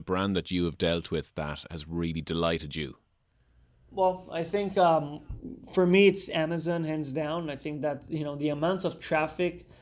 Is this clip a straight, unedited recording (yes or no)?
yes